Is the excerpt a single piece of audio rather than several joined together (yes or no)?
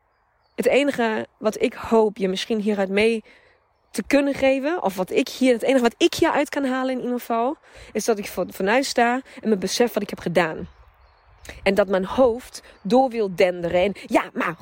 yes